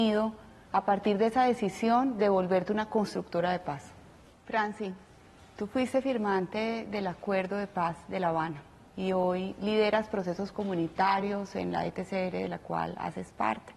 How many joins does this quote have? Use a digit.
1